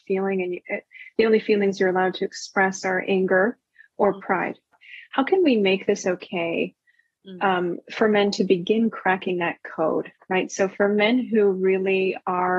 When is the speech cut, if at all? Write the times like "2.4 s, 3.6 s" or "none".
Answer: none

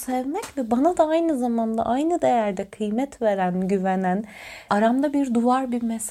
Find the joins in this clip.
4.7 s

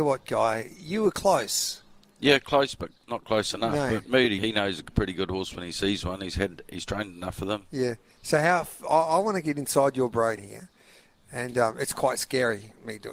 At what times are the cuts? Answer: 4.4 s

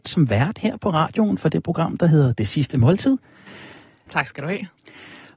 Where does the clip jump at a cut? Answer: 4.1 s

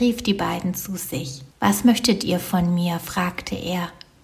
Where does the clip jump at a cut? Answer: 1.5 s

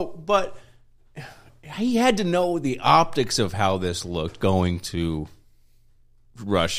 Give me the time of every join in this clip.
none

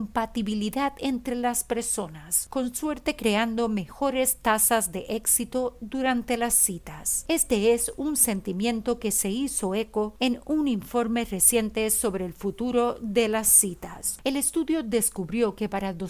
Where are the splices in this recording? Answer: 14.2 s

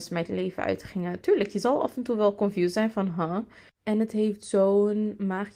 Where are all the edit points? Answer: 3.7 s

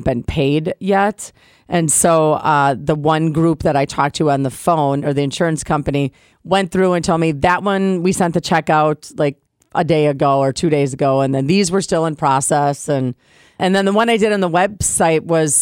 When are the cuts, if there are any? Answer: 13.6 s

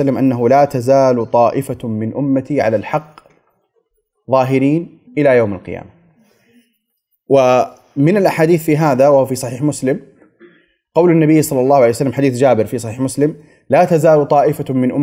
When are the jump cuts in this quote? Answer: 5.1 s

